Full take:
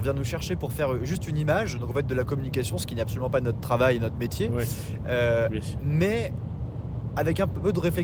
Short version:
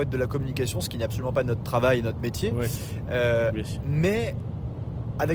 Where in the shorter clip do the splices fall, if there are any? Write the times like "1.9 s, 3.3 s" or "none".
none